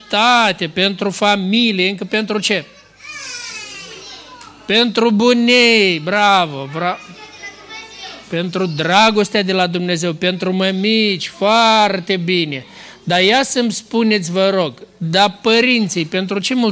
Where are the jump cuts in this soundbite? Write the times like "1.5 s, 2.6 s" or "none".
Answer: none